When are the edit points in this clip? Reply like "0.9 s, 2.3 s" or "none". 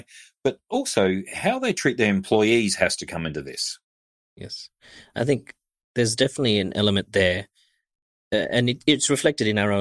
none

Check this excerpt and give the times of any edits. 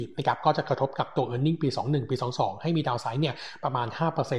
none

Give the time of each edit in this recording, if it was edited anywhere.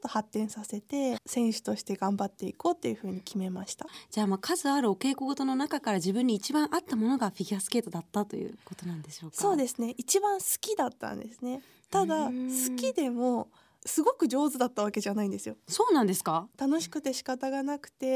1.2 s

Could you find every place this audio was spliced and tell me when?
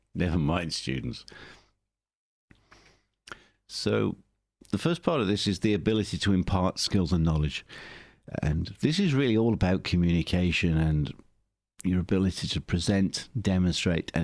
none

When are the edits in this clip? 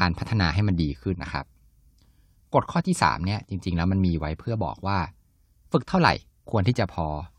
1.1 s

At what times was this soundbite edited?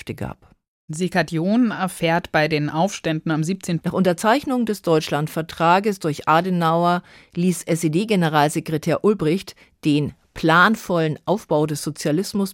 3.8 s

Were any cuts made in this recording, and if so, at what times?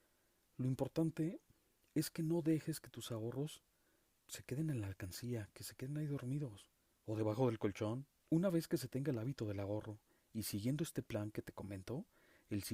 8.3 s

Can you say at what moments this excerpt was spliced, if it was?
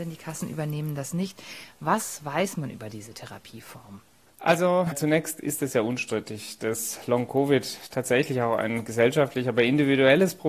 none

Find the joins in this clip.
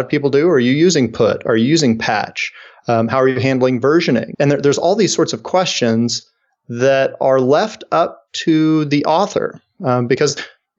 4.3 s

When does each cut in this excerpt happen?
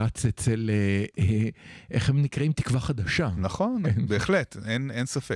3.8 s

